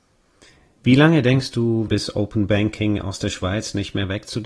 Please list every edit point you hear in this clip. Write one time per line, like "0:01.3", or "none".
0:01.9